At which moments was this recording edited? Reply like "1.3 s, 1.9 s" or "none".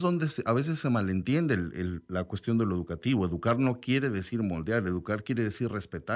none